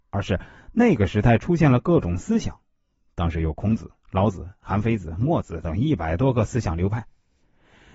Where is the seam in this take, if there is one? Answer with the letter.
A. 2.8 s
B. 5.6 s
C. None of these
B